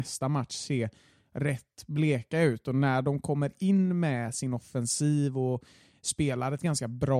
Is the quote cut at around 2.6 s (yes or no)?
no